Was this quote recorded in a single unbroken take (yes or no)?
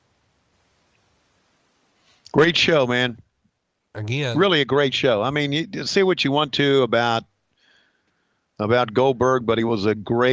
yes